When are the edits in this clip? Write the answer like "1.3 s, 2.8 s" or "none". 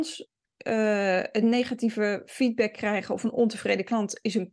1.4 s